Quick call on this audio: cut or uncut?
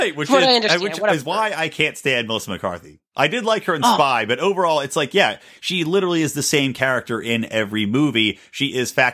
uncut